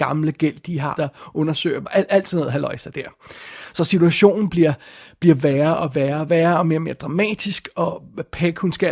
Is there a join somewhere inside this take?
yes; 1 cut; at 1.0 s

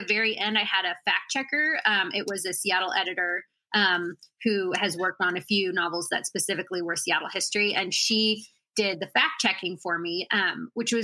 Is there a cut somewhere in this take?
no; 0 cuts

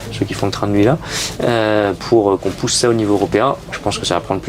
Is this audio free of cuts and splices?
yes; 0 cuts

